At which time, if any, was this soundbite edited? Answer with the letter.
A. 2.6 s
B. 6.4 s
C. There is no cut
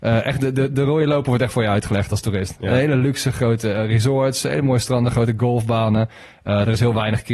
C